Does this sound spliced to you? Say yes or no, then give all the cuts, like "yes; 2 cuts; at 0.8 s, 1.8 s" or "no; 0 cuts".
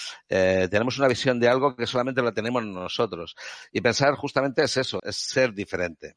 yes; 1 cut; at 5.0 s